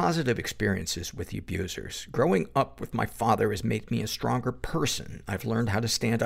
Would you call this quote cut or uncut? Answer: uncut